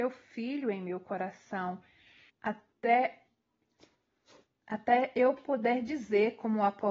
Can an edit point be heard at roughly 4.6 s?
no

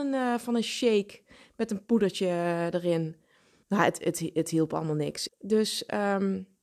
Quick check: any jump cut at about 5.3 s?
yes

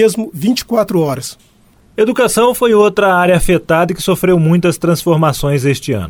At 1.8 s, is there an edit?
no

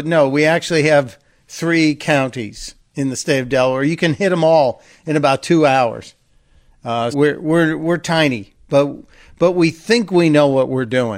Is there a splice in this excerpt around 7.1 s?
yes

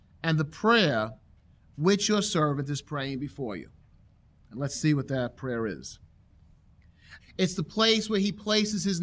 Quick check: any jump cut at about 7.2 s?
yes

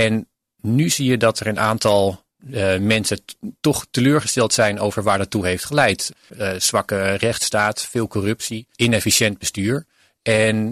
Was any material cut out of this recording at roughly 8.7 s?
yes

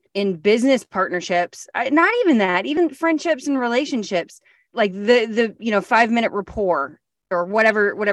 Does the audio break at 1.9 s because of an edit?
no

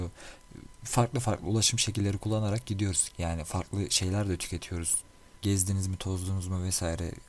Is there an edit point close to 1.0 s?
no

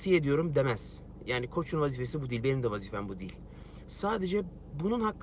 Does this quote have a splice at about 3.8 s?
yes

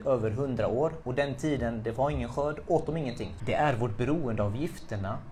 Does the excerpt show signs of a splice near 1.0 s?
yes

